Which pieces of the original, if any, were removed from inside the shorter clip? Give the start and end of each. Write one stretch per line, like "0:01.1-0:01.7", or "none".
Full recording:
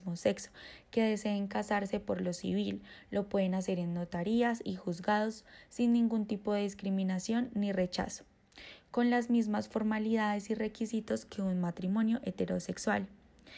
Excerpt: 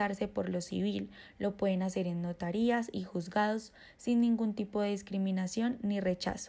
none